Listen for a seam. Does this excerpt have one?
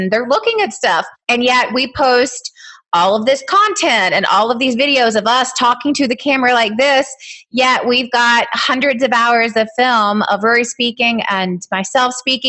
no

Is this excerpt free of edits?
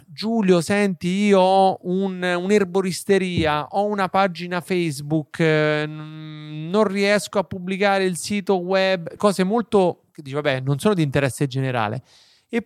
no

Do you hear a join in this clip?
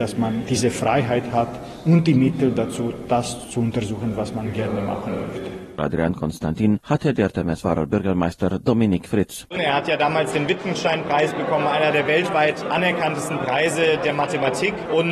yes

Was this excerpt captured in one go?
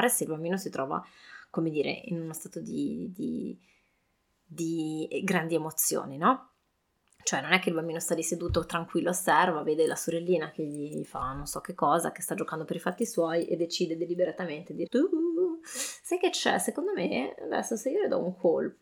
no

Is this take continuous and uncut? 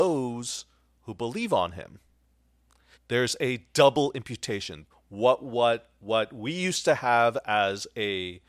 no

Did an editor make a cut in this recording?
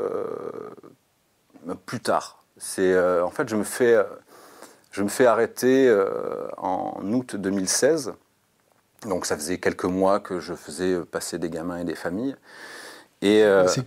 no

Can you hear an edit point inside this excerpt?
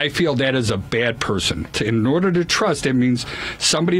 yes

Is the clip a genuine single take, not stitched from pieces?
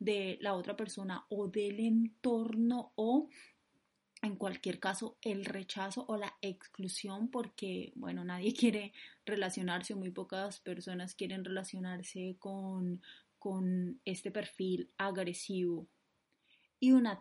yes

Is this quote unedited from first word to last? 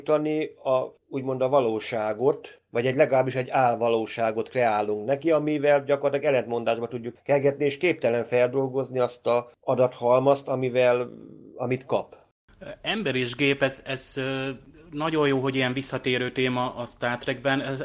yes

